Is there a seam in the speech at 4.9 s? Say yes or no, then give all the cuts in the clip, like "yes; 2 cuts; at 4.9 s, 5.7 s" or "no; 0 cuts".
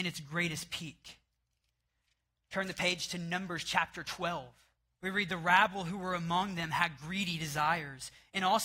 yes; 1 cut; at 4.9 s